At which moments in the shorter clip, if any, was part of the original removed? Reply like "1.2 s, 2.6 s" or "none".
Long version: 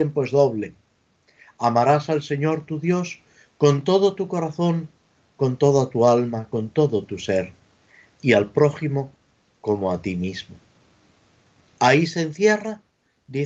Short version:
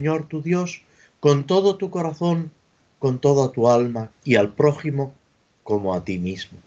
4.1 s